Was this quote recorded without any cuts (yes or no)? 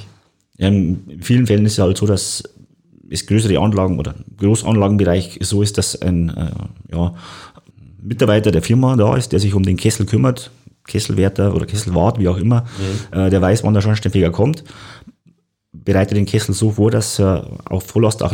yes